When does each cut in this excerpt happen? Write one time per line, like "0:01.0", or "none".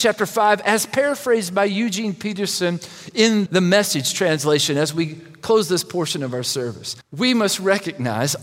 0:03.5
0:07.0